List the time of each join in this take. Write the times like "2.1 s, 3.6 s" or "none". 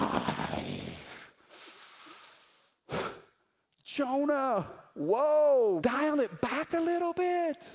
5.8 s